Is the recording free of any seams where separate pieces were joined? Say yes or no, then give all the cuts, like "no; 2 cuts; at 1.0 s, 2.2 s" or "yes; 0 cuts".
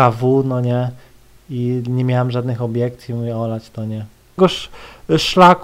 no; 1 cut; at 4.4 s